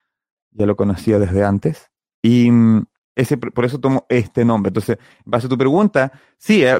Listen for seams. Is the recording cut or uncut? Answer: cut